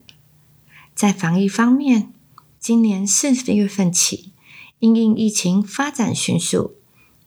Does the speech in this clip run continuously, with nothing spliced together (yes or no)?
yes